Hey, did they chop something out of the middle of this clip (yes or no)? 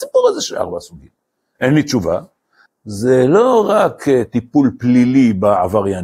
yes